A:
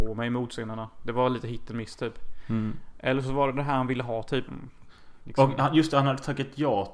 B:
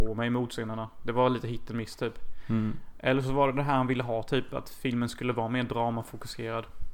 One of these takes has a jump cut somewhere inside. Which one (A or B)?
A